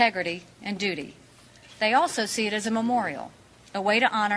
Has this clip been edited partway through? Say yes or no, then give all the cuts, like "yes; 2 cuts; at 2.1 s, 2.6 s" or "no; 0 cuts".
no; 0 cuts